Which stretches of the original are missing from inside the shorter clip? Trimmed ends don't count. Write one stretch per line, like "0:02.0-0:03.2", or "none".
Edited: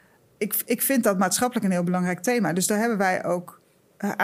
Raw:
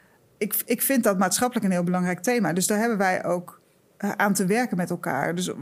none